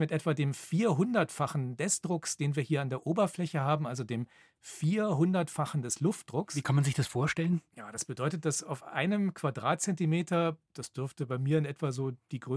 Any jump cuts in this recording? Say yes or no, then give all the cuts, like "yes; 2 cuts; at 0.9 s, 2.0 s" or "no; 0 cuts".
no; 0 cuts